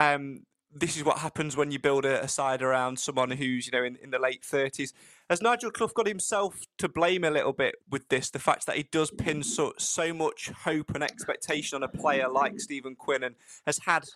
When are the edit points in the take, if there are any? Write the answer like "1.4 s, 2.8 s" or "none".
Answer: 7.8 s